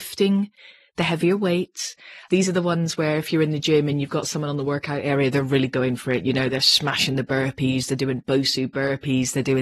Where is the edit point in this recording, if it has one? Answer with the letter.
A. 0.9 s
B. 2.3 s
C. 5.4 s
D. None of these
B